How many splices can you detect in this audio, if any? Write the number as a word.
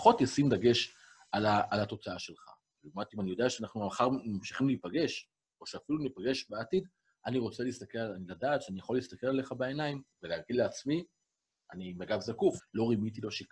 two